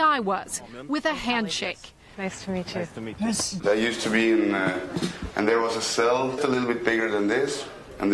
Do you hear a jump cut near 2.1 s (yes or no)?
no